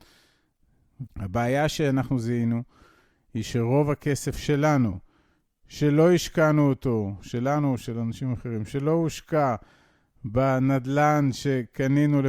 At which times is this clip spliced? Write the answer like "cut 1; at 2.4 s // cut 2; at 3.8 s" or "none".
cut 1; at 1.1 s